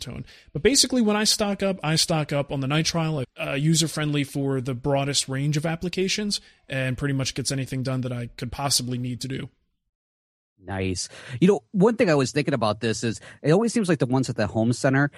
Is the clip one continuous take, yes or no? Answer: no